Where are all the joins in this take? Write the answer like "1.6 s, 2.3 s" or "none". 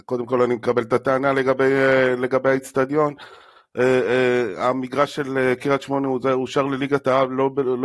none